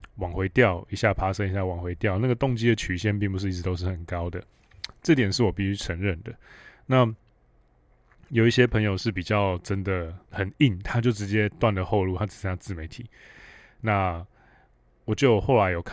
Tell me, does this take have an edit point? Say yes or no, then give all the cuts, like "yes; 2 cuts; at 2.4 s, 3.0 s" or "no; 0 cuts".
yes; 1 cut; at 10.3 s